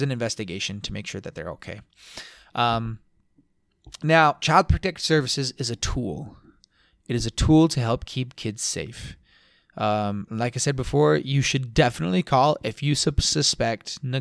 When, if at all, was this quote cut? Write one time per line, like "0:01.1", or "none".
none